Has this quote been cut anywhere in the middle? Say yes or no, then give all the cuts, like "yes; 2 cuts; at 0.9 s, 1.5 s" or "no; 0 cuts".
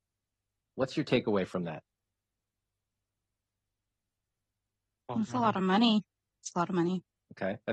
no; 0 cuts